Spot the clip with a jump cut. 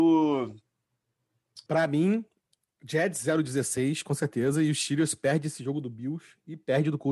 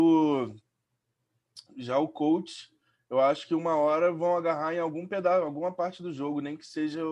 first; 1 cut; at 1.7 s

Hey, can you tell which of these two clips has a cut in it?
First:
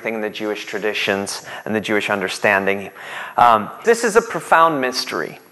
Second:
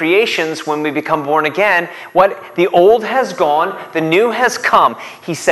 first; 1 cut; at 3.8 s

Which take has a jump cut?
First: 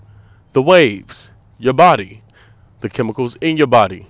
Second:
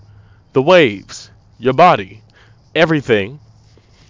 second; 1 cut; at 2.6 s

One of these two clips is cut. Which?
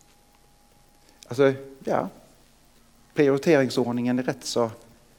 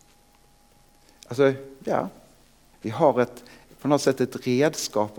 second; 1 cut; at 2.7 s

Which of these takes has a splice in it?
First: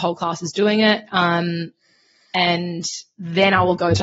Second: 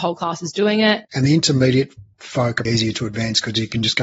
second; 2 cuts; at 1.0 s, 2.7 s

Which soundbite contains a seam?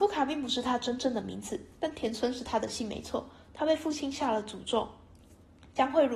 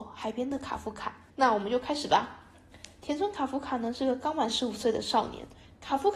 second; 1 cut; at 1.3 s

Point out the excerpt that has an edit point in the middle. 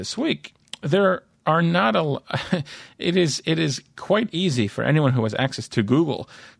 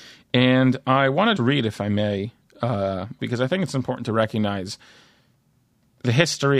second; 2 cuts; at 1.4 s, 3.2 s

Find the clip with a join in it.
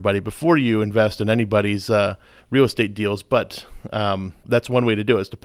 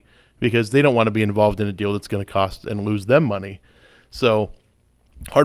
first; 1 cut; at 4.4 s

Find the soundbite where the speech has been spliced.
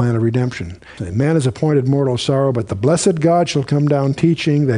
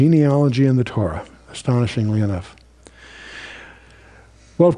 first; 1 cut; at 1.0 s

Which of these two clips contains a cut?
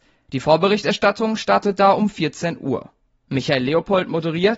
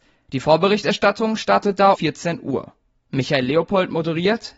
second; 1 cut; at 1.9 s

